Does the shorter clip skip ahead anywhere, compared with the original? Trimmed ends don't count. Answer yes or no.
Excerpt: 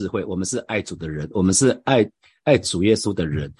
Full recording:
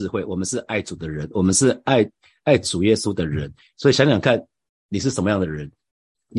no